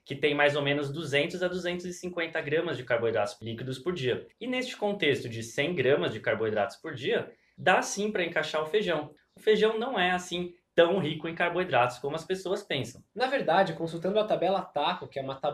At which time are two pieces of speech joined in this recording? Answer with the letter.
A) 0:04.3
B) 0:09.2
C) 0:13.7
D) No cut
A